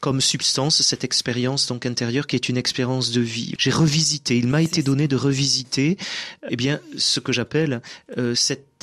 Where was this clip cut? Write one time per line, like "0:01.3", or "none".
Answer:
0:03.6
0:06.5